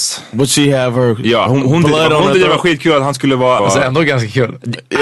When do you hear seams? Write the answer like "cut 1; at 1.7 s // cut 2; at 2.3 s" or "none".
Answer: cut 1; at 1.5 s // cut 2; at 3.6 s